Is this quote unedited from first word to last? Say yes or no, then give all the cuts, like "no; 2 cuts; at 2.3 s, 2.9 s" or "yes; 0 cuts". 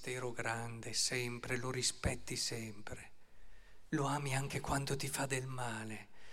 no; 1 cut; at 3.9 s